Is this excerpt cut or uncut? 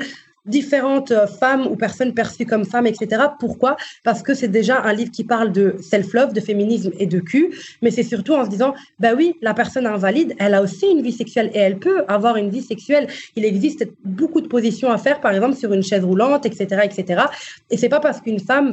uncut